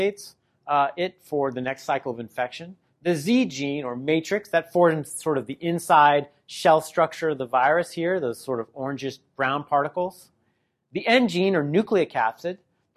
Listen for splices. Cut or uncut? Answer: uncut